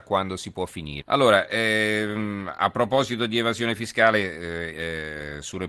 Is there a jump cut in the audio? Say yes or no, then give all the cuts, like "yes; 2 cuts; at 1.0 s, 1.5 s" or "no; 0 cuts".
yes; 2 cuts; at 1.0 s, 4.7 s